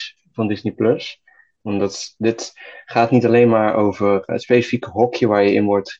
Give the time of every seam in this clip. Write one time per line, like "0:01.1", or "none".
0:01.6
0:04.3